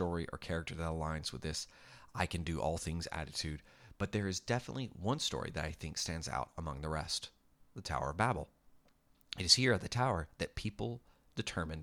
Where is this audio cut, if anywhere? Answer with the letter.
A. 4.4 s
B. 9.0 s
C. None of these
C